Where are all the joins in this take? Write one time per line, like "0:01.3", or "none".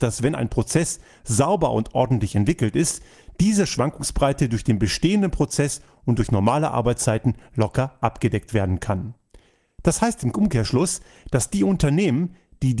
none